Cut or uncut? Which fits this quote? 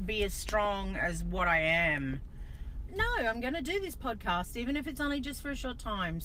cut